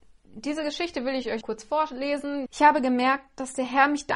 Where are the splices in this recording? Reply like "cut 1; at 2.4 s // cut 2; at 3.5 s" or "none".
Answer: cut 1; at 1.4 s // cut 2; at 2.5 s